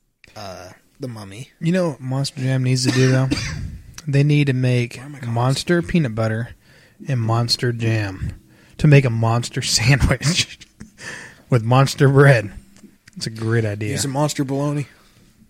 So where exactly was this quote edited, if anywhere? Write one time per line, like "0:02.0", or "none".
0:13.0